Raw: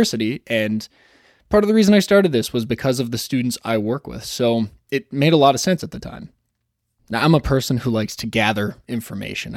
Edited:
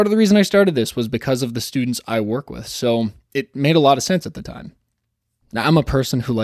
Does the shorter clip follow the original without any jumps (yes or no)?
yes